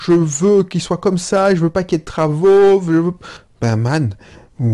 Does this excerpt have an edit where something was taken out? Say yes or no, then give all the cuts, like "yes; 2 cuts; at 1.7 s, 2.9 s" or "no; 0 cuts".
no; 0 cuts